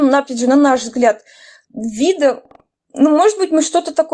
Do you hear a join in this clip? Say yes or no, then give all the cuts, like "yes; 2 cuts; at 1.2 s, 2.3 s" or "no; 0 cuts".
yes; 1 cut; at 1.6 s